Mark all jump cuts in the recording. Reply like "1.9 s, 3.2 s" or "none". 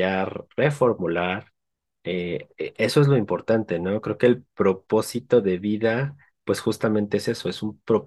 none